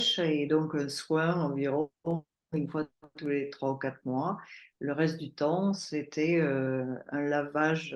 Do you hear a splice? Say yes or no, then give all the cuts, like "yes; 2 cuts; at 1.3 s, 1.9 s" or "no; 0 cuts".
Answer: no; 0 cuts